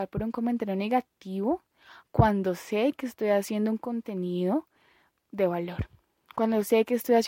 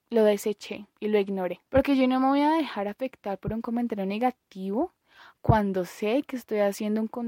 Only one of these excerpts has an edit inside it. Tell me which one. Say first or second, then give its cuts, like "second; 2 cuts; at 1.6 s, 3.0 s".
second; 1 cut; at 1.7 s